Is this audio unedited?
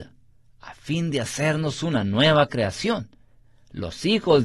yes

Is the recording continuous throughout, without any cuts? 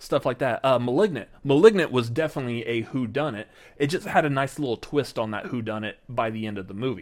yes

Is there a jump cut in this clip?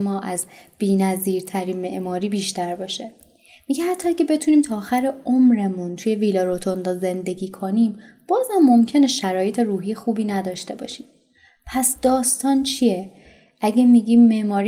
no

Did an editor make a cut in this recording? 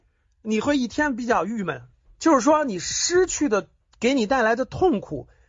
yes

